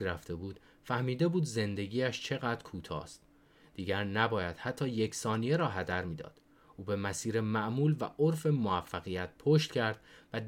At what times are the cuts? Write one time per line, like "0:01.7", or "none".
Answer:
none

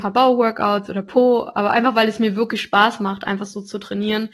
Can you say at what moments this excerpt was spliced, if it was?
none

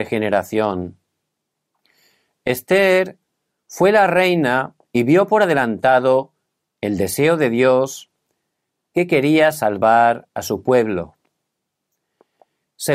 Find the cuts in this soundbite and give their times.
none

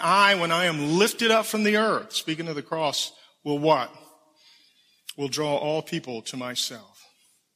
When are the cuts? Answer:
none

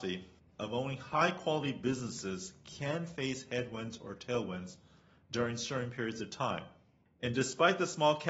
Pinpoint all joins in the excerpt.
none

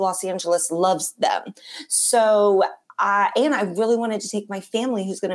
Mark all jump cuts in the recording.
none

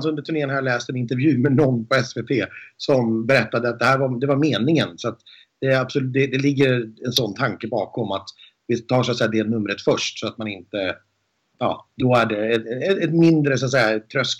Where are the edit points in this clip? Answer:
none

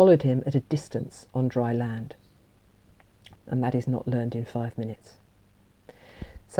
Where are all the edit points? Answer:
0:03.4

